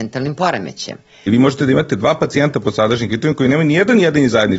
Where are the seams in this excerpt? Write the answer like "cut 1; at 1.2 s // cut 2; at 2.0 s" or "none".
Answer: cut 1; at 1.3 s